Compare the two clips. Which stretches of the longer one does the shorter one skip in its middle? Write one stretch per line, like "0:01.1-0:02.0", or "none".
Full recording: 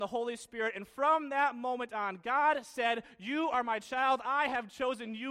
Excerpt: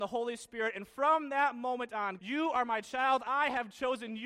0:02.2-0:03.2